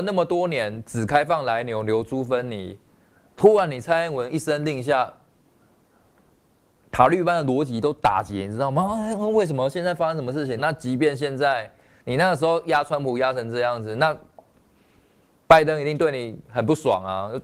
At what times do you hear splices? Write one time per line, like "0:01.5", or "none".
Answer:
0:10.6